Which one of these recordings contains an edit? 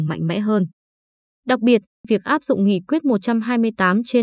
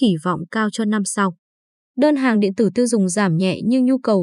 first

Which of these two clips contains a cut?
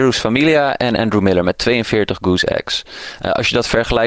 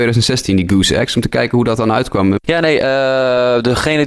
second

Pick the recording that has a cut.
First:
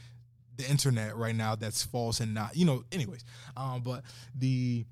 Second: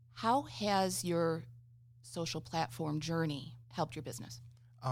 second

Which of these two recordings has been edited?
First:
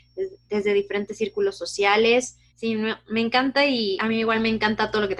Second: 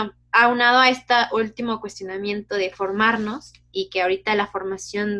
first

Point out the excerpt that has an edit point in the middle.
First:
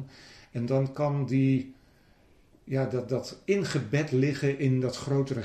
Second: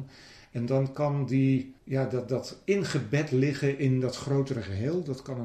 second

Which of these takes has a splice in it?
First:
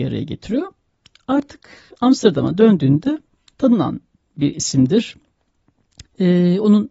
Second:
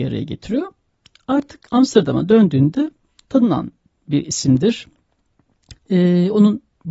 second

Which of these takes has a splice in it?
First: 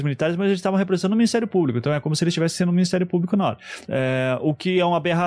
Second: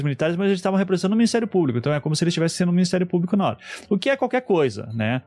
first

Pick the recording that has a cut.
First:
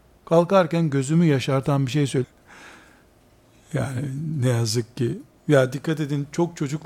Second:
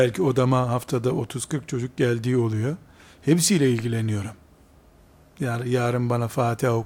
first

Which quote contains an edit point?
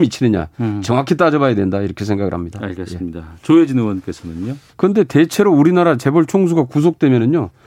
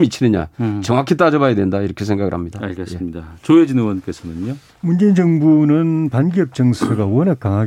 first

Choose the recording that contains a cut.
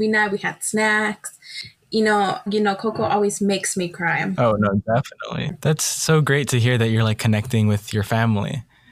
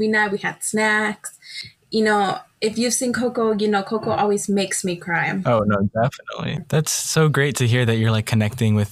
first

